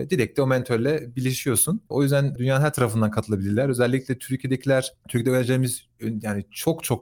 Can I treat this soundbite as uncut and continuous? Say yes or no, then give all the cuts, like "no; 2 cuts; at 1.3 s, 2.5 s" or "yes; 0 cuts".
yes; 0 cuts